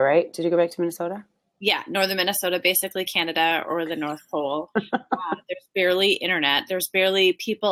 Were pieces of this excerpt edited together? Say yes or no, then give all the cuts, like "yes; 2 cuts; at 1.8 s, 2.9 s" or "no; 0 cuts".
no; 0 cuts